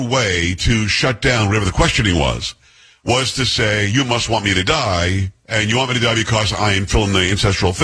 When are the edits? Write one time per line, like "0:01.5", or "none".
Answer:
none